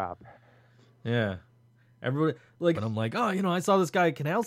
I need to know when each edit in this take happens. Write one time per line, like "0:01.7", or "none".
0:02.7